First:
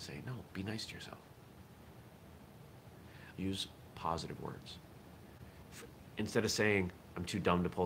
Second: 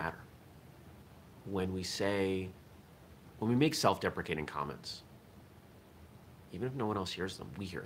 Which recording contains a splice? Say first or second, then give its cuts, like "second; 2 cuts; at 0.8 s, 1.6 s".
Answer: first; 1 cut; at 3.3 s